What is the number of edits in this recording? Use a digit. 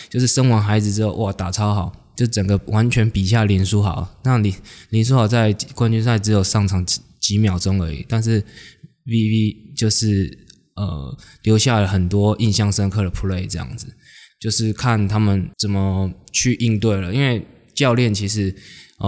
2